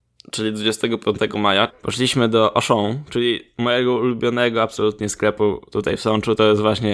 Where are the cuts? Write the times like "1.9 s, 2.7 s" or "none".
1.7 s